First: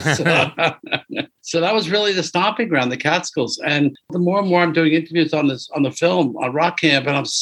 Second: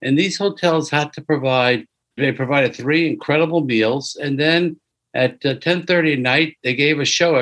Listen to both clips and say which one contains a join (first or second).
second